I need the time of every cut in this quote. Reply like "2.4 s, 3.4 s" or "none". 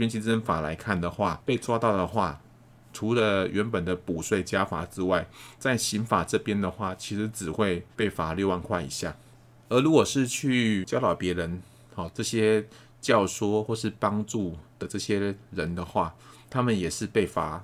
7.9 s, 9.6 s, 12.1 s